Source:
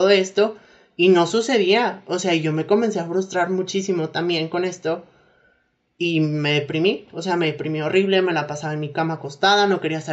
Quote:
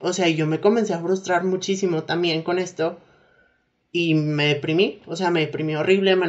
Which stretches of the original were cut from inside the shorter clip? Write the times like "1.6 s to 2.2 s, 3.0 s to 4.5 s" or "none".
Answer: none